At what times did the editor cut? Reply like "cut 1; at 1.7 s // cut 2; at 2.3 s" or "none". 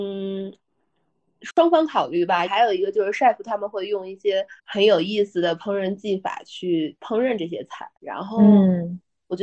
cut 1; at 2.5 s // cut 2; at 4.6 s // cut 3; at 8.0 s